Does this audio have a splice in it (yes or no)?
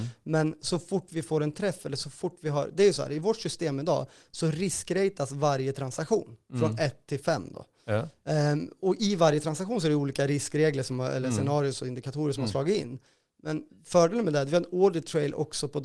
no